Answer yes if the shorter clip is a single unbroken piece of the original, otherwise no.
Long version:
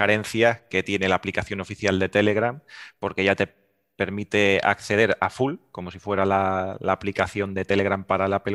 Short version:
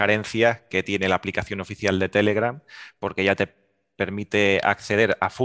yes